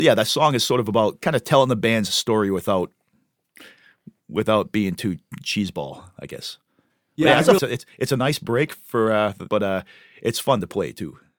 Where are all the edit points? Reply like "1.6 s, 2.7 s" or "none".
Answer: 7.6 s, 9.5 s